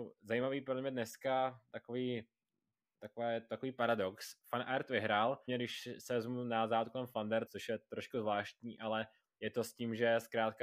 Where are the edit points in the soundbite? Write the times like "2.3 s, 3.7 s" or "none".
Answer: 5.5 s, 7.5 s

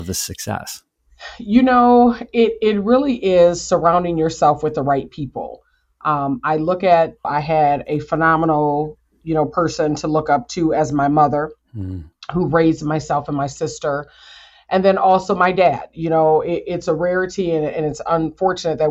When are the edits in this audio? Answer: 7.2 s

